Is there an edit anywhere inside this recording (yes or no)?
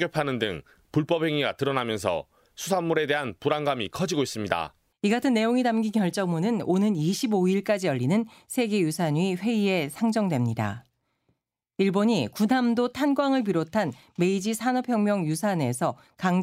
yes